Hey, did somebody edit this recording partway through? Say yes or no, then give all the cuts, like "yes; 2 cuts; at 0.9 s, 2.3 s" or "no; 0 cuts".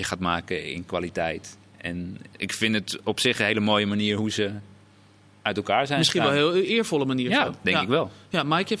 no; 0 cuts